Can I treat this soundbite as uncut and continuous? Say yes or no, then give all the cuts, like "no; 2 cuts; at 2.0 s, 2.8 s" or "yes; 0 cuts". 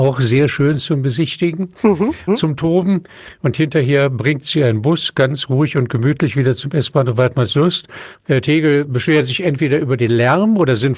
no; 2 cuts; at 2.3 s, 8.2 s